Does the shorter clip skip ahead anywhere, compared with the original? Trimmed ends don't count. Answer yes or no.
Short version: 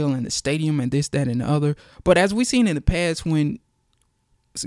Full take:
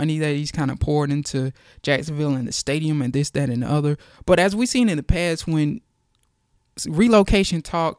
no